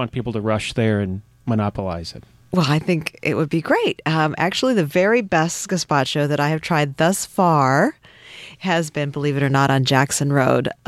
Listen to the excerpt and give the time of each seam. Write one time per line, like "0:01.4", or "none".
none